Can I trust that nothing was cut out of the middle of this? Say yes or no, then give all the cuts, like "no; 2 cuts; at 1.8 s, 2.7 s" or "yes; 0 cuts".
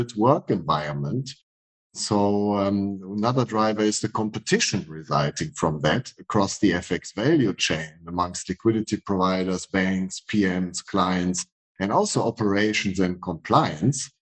yes; 0 cuts